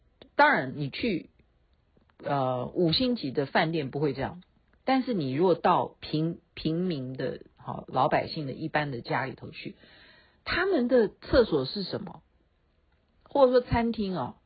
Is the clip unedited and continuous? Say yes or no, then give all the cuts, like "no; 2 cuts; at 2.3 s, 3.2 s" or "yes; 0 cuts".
yes; 0 cuts